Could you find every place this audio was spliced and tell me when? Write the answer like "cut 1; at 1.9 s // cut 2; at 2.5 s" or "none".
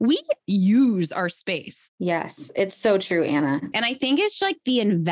cut 1; at 1.9 s // cut 2; at 3.7 s